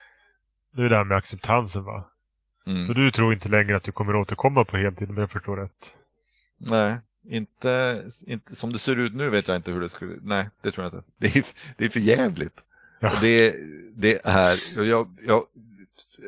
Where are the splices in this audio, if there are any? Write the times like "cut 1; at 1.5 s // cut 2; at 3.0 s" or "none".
none